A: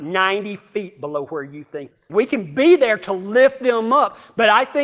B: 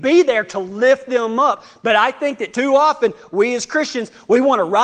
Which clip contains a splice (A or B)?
A